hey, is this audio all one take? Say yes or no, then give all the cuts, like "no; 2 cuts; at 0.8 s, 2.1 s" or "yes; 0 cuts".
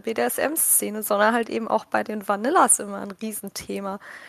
yes; 0 cuts